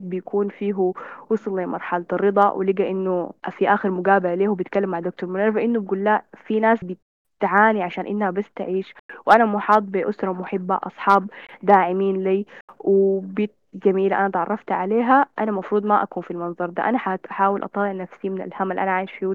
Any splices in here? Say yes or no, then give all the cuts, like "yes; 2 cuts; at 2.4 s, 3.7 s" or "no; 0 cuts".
yes; 1 cut; at 3.4 s